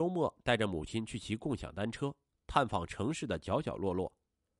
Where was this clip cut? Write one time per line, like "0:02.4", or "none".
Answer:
0:02.3